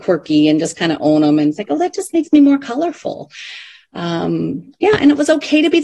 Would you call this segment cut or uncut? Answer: uncut